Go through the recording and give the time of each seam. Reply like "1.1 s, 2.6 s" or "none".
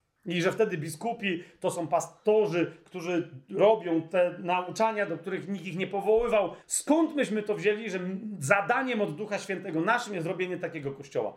6.6 s